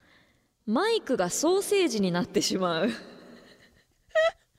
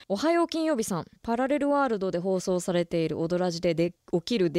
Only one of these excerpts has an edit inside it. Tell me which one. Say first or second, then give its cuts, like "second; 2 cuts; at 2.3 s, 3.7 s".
second; 1 cut; at 1.1 s